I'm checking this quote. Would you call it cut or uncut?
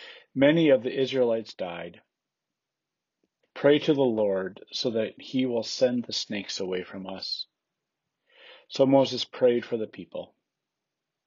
cut